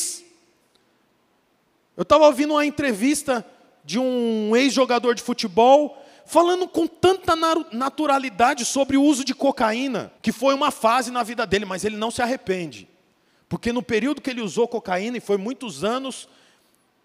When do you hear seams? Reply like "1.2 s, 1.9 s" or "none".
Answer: 10.2 s